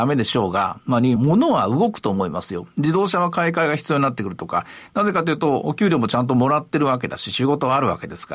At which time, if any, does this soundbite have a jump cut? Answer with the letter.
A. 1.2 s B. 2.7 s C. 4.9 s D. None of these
A